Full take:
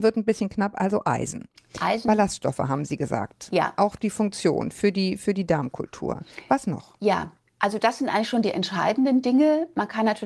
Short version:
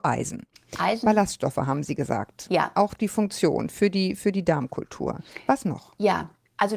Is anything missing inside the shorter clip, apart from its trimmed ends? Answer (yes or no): no